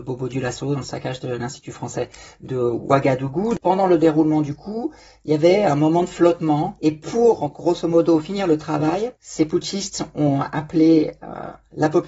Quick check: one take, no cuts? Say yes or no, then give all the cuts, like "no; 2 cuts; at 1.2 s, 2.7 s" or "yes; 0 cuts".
no; 2 cuts; at 3.6 s, 9.2 s